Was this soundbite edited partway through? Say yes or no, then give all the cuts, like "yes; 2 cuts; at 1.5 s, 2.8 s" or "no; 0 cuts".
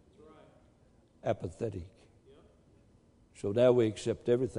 no; 0 cuts